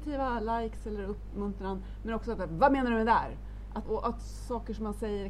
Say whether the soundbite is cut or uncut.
cut